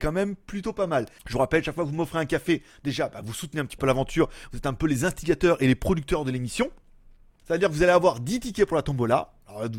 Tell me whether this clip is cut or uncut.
cut